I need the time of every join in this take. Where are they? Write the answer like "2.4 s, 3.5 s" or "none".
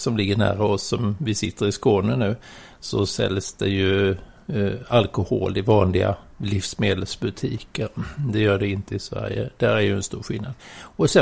none